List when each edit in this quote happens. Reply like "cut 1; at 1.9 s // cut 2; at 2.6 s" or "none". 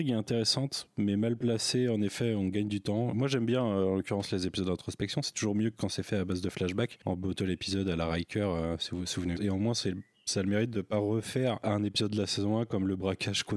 cut 1; at 3.1 s // cut 2; at 9.3 s